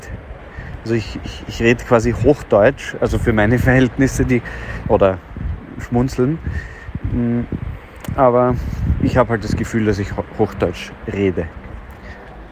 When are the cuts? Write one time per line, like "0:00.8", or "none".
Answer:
0:04.8